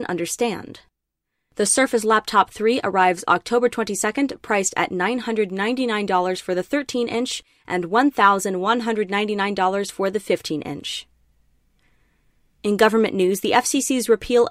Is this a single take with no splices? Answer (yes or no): no